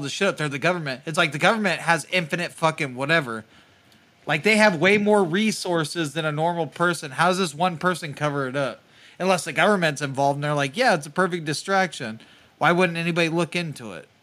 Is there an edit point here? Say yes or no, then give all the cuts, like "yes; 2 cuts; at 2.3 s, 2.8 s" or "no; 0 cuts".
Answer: no; 0 cuts